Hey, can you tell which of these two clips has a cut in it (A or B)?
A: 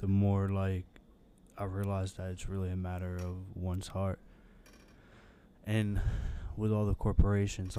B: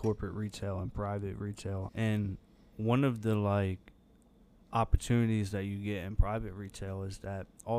B